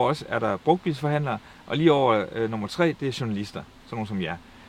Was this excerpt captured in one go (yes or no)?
yes